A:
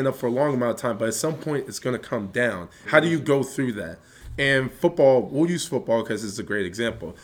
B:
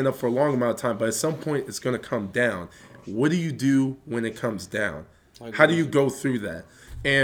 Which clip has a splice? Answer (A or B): A